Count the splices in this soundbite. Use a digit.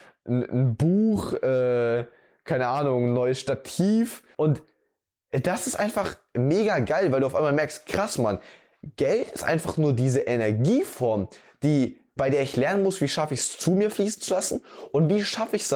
1